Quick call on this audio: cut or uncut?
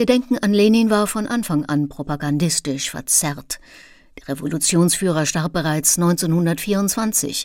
uncut